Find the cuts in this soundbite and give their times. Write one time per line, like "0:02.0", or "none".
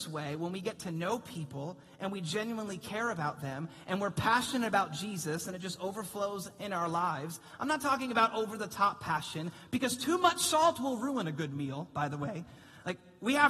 none